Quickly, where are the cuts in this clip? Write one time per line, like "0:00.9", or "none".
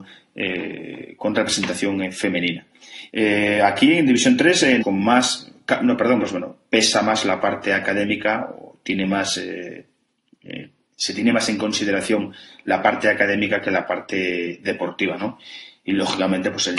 0:03.1
0:04.8
0:06.2